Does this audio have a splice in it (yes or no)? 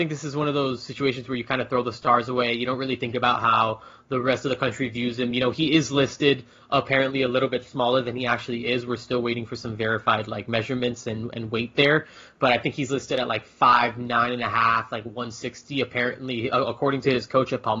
no